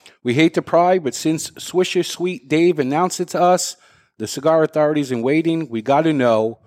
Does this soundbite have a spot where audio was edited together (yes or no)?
no